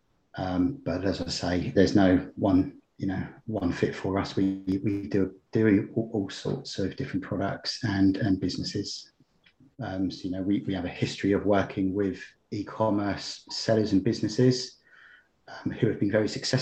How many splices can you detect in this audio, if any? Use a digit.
2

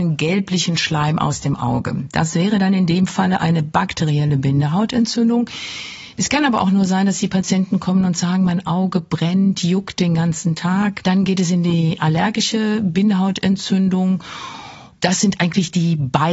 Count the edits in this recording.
0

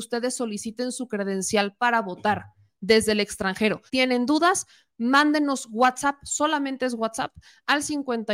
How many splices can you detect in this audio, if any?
1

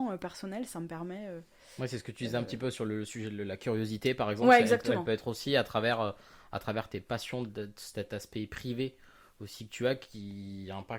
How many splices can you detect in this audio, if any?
0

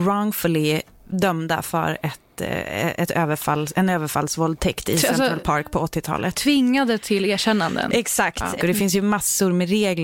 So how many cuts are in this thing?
1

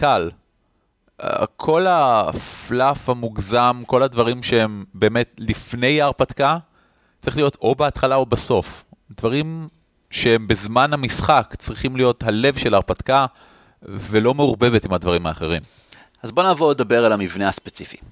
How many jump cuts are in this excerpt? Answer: 0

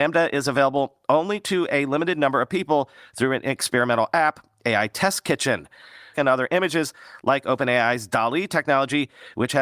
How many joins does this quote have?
1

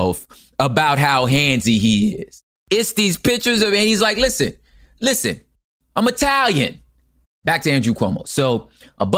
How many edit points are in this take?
1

